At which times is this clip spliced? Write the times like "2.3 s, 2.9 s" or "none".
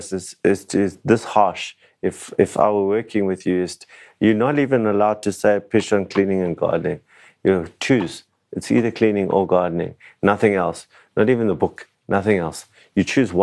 none